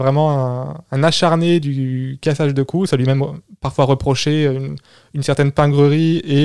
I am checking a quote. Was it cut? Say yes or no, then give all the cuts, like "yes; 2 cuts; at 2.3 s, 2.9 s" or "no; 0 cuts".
no; 0 cuts